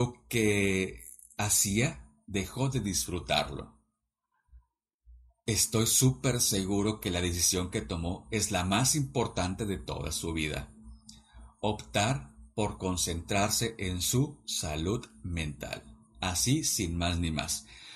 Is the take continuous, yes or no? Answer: yes